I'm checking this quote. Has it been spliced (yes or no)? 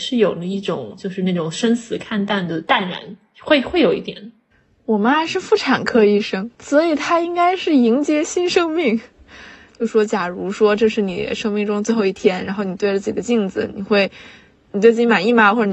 yes